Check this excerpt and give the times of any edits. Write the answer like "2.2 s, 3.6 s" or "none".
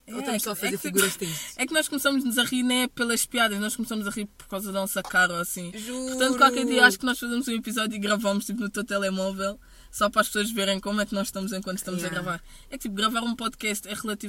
none

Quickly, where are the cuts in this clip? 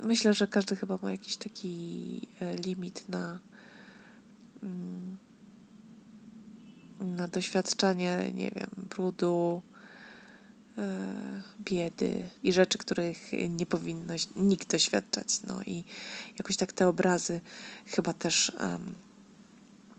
12.4 s

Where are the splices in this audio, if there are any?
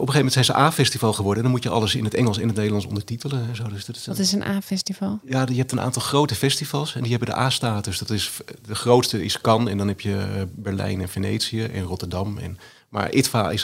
none

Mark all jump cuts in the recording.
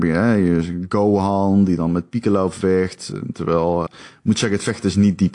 3.9 s

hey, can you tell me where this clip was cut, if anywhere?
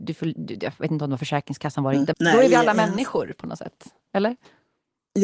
2.1 s

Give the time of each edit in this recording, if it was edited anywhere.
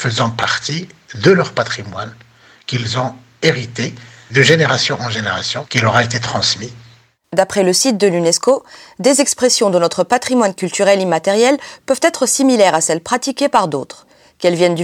7.2 s

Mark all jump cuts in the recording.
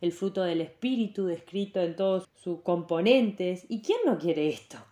2.2 s

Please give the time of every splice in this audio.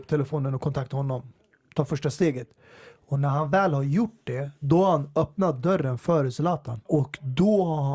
6.8 s

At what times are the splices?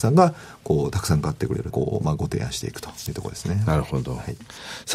1.7 s

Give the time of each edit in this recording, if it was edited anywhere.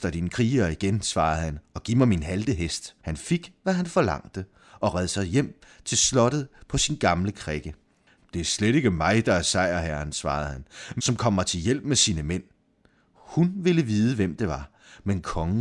3.0 s, 8.2 s, 11.0 s

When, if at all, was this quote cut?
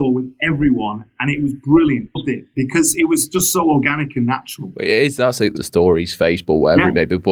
2.2 s, 5.6 s

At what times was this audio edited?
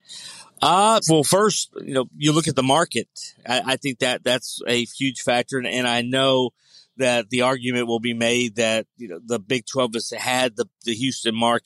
1.0 s, 4.2 s

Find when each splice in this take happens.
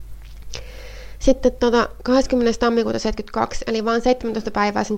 none

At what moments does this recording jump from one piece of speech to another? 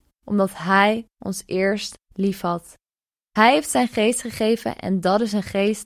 3.1 s

